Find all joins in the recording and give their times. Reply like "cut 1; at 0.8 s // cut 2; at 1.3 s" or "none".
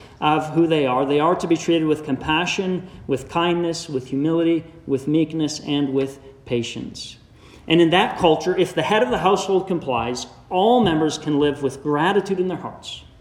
none